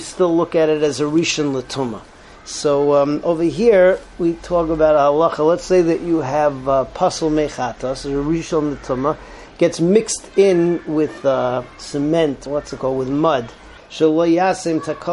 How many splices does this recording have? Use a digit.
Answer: 2